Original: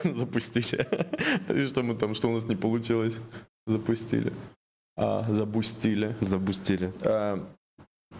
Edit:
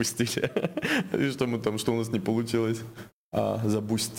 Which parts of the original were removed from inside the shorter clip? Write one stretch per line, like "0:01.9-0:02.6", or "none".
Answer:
0:03.5-0:04.8